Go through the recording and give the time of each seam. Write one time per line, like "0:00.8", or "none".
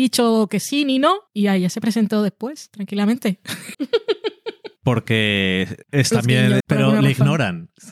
0:03.7
0:06.6